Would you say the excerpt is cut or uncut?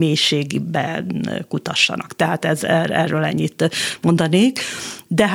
uncut